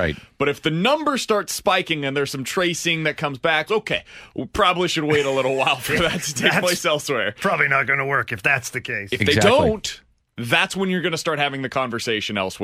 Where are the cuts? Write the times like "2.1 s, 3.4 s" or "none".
3.7 s, 10.2 s